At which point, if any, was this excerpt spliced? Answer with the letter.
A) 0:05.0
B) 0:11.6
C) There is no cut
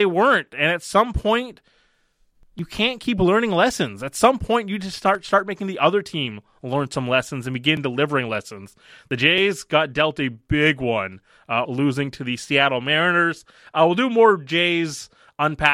B